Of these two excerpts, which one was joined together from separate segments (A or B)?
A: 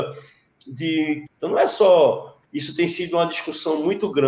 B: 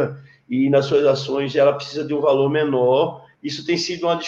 A